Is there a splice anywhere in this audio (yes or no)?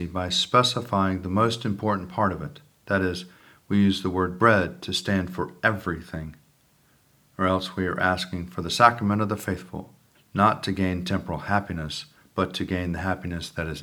yes